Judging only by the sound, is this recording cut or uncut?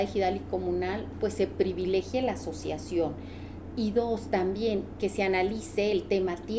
uncut